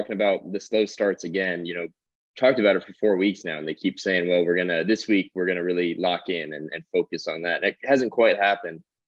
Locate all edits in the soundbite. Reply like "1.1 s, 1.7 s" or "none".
none